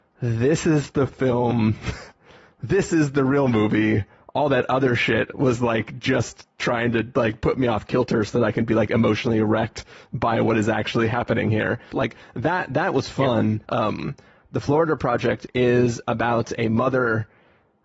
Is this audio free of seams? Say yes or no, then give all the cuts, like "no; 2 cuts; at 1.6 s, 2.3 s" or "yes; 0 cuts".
no; 2 cuts; at 11.9 s, 13.6 s